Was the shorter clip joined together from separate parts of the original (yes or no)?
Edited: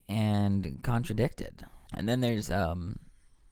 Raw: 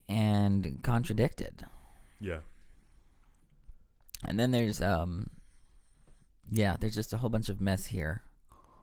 yes